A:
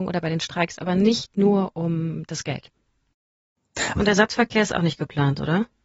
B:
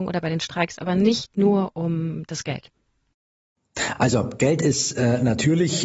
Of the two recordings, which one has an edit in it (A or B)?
A